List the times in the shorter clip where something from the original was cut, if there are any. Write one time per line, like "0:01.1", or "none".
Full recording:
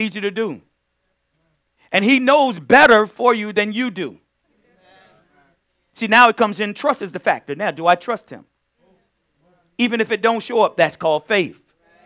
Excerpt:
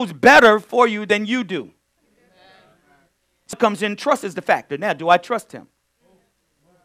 0:03.5